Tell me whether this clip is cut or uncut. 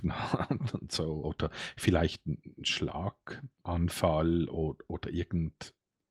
uncut